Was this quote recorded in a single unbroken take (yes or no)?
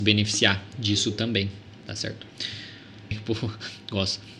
no